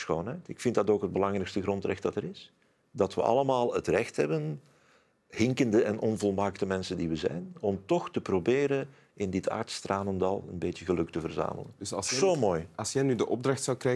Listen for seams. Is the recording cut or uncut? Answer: uncut